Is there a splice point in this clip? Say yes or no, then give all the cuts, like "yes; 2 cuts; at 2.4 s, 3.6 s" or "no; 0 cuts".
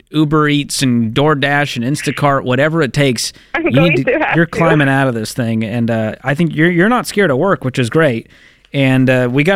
no; 0 cuts